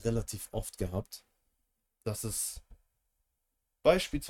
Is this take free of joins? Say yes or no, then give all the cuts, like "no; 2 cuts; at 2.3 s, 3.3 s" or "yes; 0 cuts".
yes; 0 cuts